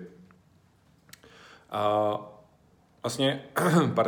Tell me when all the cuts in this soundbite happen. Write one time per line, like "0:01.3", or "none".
none